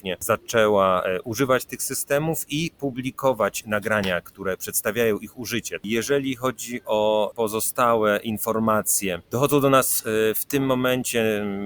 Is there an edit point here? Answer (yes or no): yes